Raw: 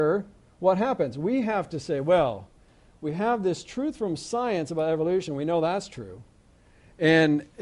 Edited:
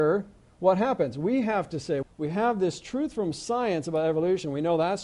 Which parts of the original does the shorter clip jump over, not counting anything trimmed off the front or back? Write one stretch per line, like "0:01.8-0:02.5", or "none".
0:02.0-0:02.9